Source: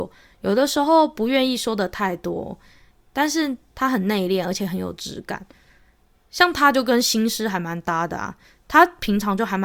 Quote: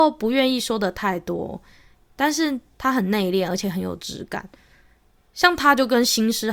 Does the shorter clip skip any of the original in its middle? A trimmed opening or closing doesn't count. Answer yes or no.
no